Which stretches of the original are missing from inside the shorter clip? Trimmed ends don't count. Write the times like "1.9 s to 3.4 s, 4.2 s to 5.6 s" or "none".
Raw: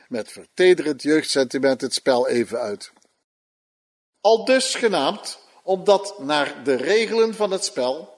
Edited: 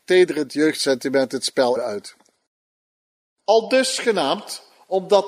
2.3 s to 2.5 s